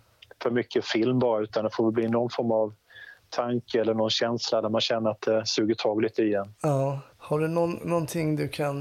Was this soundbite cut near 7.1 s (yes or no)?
yes